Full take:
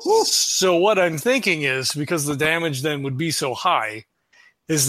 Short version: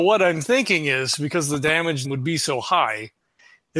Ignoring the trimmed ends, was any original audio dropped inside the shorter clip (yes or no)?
yes